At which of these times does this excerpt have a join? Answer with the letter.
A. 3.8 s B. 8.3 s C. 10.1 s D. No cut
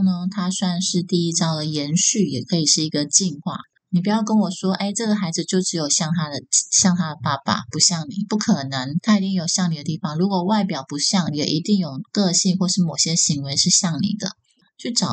A